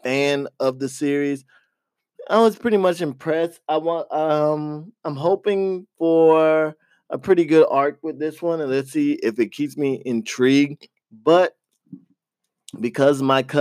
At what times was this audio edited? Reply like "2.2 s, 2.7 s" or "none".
11.0 s